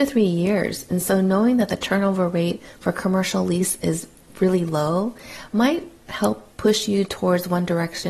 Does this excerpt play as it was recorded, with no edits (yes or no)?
yes